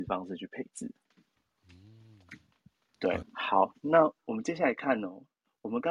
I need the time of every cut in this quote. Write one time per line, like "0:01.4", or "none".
0:03.2